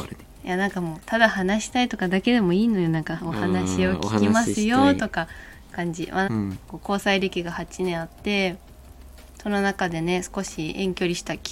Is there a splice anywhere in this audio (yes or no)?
yes